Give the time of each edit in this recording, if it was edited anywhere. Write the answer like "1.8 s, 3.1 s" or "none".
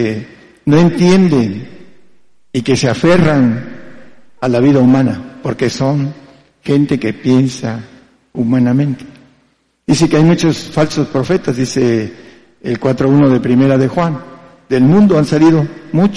none